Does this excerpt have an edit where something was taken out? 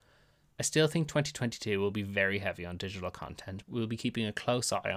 yes; 1 cut; at 3.6 s

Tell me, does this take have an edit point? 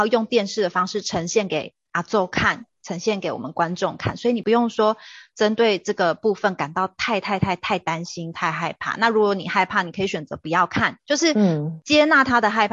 no; 0 cuts

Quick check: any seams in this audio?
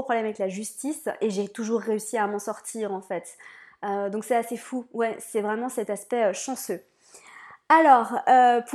no; 0 cuts

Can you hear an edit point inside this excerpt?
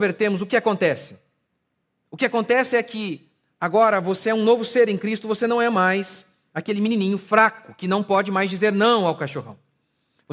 no; 0 cuts

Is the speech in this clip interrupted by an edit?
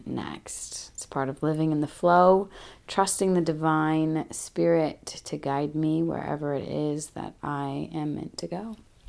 no; 0 cuts

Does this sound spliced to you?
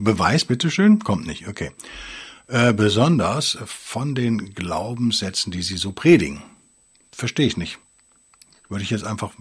no; 0 cuts

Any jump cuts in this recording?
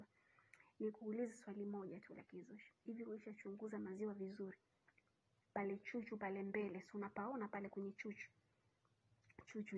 no; 0 cuts

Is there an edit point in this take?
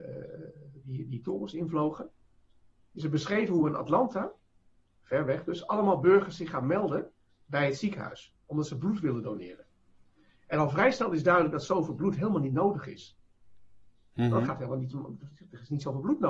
no; 0 cuts

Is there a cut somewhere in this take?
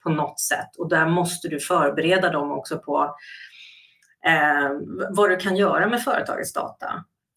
no; 0 cuts

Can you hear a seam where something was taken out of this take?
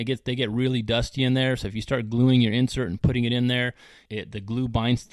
yes; 1 cut; at 4.1 s

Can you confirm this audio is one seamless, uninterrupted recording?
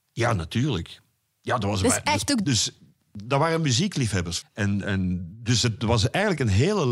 no; 2 cuts; at 2.4 s, 4.4 s

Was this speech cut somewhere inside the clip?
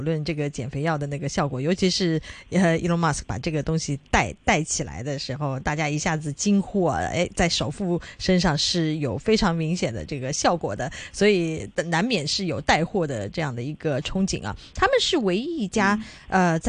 no; 0 cuts

